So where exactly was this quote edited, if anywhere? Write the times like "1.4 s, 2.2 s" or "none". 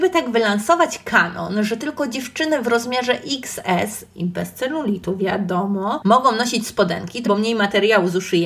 7.2 s